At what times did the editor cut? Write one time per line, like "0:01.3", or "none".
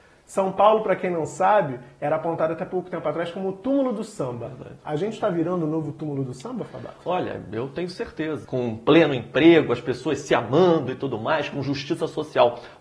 0:08.4